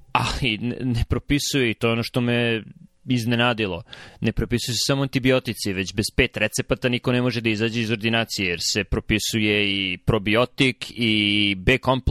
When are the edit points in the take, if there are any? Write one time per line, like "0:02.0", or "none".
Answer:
none